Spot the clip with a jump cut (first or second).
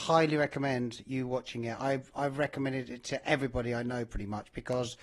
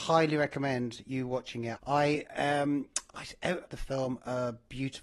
second